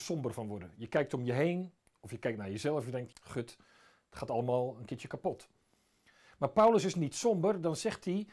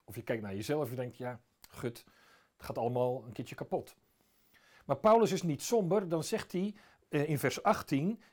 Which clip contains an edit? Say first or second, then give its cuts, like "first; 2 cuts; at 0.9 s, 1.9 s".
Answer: first; 1 cut; at 3.1 s